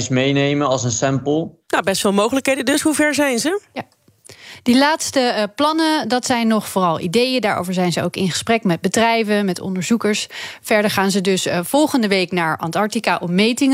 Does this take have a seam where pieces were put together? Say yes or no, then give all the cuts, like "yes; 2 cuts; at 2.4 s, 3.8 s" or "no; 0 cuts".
no; 0 cuts